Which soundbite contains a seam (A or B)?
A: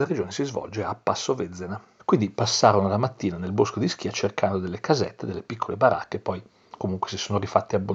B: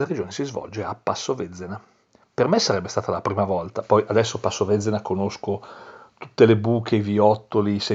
A